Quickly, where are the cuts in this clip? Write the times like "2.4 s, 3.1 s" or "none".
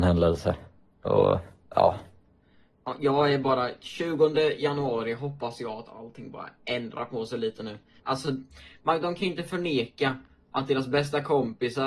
8.0 s